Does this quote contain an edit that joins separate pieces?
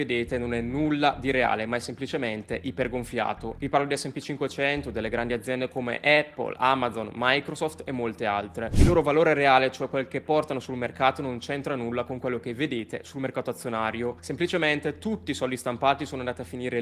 no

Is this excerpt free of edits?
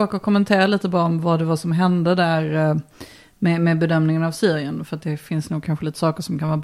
yes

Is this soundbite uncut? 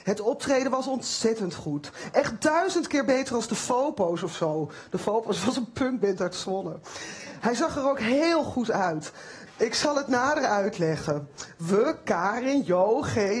no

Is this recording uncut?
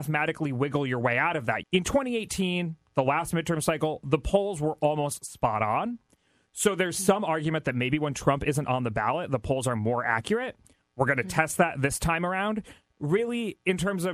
no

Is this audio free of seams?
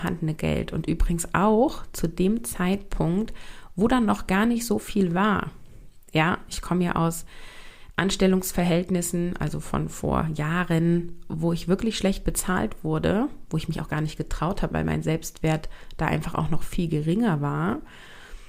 no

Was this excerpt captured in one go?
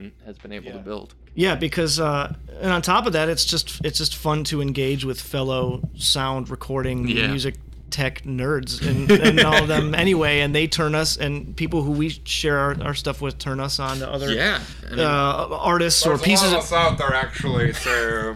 yes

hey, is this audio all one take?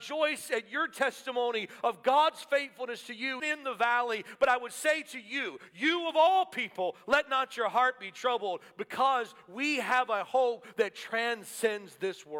no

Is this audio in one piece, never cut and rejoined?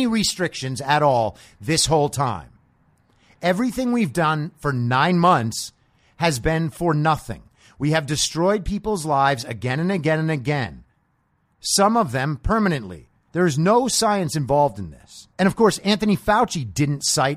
no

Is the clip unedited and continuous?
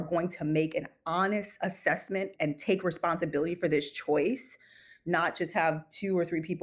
no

